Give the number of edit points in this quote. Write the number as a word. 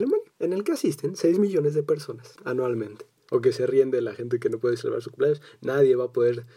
one